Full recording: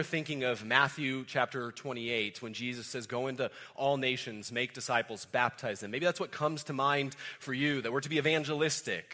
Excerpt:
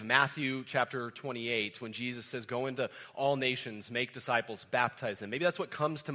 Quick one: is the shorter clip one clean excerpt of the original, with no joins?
yes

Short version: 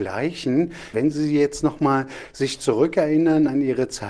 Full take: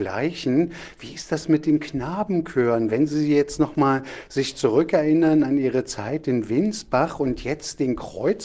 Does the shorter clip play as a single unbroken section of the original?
no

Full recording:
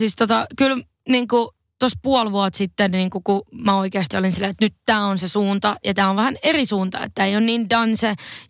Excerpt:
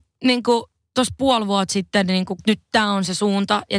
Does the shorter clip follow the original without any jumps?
no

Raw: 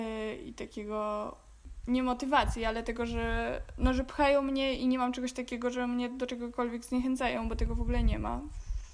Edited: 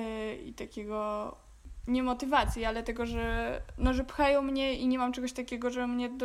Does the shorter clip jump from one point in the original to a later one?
no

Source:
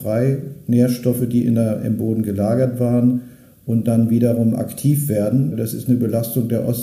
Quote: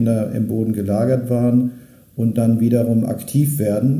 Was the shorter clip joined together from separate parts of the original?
no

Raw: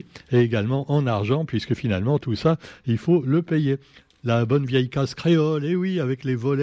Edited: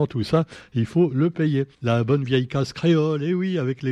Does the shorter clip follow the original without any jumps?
no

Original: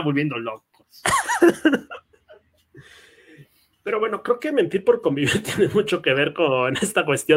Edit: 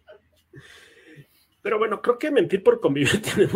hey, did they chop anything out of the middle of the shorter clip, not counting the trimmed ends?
no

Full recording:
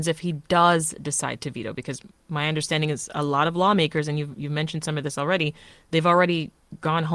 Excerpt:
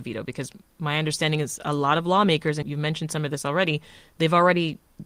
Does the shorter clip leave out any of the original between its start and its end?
yes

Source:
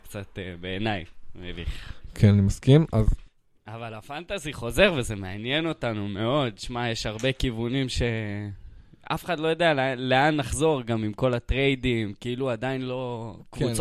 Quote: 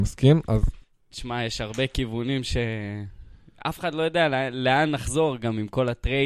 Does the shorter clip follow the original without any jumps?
no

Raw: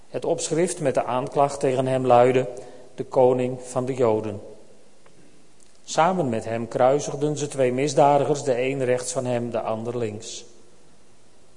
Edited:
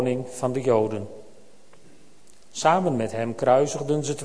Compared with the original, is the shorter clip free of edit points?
yes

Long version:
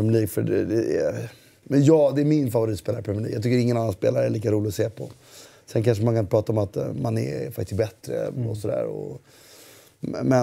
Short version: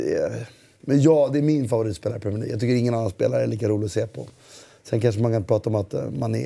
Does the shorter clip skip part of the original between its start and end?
no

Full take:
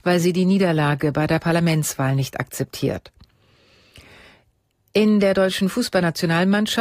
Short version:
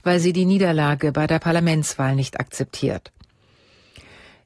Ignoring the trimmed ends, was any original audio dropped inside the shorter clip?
no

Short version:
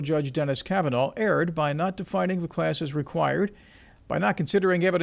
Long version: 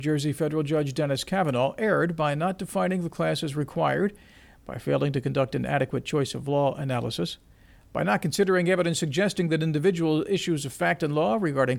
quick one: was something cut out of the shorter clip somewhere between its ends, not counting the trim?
yes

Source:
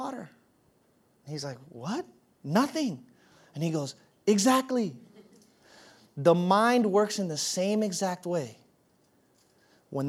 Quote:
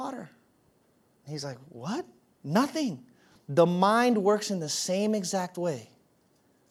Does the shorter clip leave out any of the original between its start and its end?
yes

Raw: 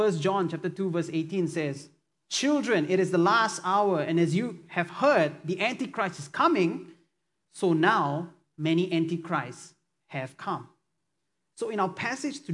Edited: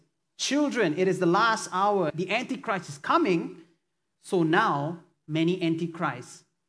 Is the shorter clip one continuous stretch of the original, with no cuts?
no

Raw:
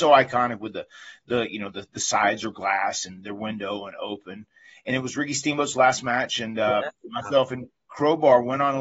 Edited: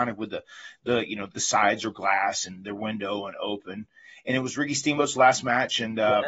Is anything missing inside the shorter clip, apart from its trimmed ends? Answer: yes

